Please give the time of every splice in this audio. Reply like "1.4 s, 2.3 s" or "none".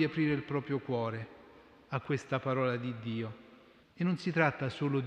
3.8 s